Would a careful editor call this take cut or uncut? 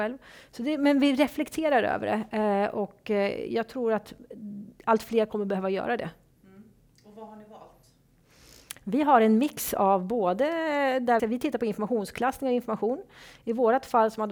cut